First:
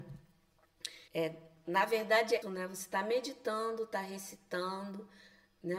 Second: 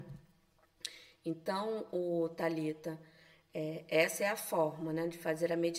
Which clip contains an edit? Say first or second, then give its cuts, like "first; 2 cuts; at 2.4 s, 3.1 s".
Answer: first; 2 cuts; at 1.1 s, 2.4 s